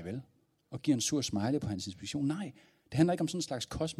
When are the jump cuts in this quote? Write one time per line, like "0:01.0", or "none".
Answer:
none